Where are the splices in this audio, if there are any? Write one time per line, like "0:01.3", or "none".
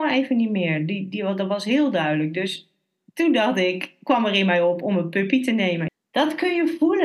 0:05.9